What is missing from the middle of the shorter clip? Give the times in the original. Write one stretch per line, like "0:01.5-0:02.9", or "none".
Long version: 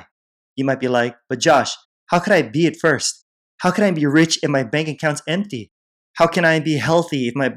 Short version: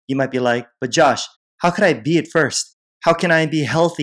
0:03.4-0:06.0